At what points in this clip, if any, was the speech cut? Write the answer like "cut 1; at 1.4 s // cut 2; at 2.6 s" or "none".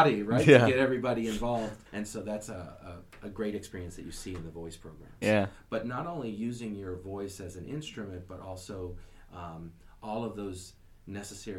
cut 1; at 1.9 s // cut 2; at 5.2 s